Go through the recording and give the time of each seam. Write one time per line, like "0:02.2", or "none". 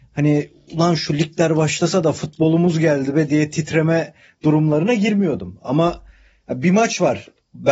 none